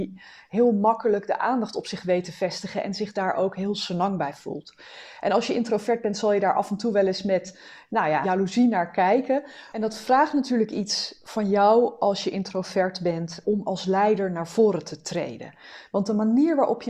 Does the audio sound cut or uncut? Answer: cut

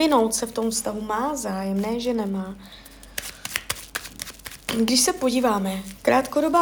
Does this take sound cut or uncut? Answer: uncut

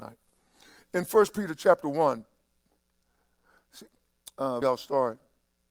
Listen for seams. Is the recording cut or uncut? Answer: cut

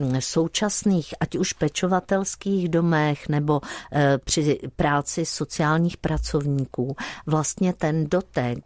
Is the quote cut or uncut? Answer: uncut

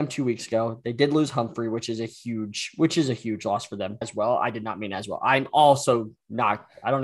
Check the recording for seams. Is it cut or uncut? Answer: cut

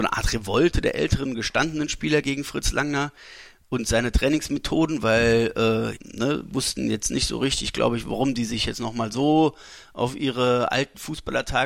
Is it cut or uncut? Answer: cut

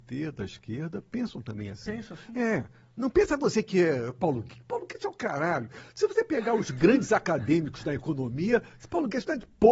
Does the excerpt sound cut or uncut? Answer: uncut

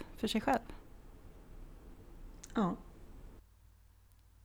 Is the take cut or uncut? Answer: uncut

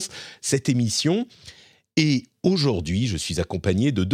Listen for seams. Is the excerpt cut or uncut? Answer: uncut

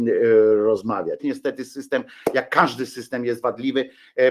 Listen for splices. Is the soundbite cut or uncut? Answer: cut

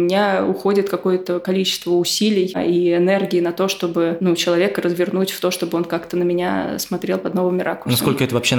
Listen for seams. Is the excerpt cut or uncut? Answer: uncut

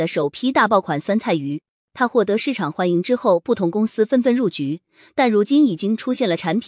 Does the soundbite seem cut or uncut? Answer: uncut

